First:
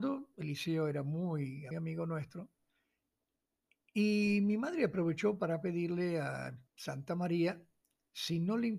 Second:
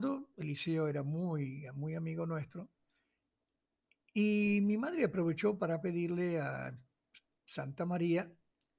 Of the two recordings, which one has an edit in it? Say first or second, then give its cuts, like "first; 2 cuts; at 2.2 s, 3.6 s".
first; 2 cuts; at 1.7 s, 6.7 s